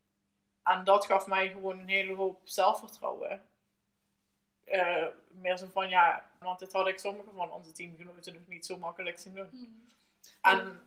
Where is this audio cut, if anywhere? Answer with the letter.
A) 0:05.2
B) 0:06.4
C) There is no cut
B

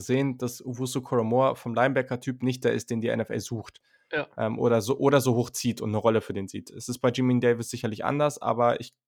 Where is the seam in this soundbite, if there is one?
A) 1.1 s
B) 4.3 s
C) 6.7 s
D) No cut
D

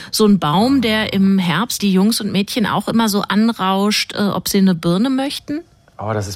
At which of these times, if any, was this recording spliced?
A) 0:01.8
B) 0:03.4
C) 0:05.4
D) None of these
A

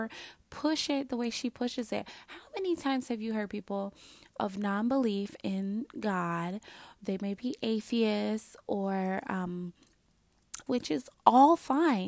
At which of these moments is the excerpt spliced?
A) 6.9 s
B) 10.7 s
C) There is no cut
B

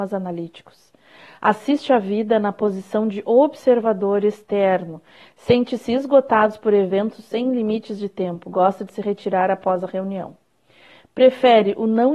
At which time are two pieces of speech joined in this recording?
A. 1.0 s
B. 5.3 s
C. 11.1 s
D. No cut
B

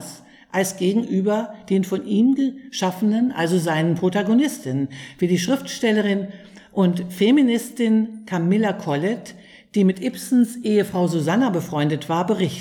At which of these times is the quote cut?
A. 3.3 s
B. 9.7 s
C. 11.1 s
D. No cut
D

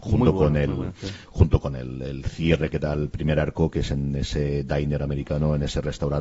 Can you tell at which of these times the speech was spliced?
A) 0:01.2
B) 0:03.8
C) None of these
C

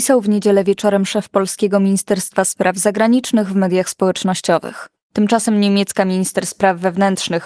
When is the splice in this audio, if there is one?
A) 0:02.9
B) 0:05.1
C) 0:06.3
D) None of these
B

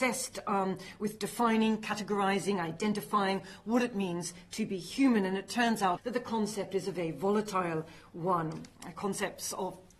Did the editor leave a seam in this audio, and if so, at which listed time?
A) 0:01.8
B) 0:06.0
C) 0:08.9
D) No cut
B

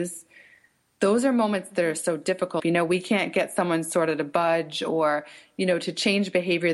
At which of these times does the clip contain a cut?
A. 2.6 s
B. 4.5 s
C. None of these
A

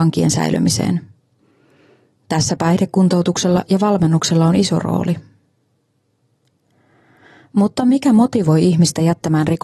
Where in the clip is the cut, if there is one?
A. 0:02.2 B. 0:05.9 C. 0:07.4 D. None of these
D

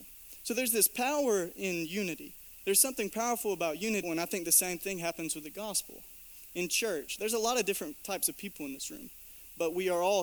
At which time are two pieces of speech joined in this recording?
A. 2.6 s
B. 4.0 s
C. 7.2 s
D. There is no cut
B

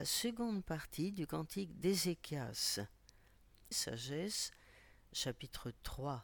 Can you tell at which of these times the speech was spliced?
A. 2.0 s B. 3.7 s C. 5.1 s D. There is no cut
B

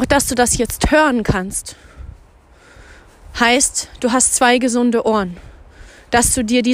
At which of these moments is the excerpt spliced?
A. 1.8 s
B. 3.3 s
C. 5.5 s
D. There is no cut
D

